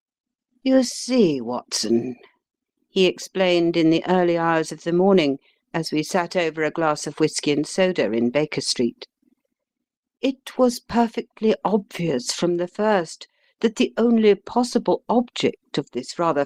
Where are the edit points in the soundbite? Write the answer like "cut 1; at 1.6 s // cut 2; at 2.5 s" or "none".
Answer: none